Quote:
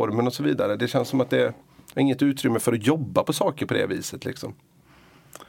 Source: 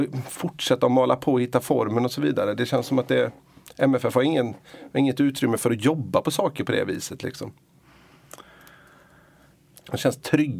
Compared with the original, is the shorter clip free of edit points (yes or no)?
no